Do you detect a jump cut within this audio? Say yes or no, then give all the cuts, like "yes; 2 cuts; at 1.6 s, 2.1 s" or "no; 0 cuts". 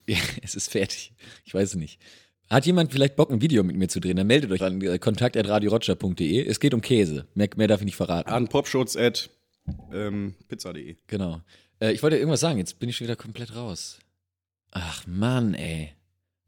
yes; 1 cut; at 4.6 s